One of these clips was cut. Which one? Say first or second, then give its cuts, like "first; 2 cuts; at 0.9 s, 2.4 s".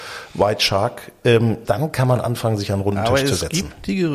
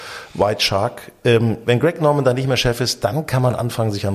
first; 1 cut; at 1.6 s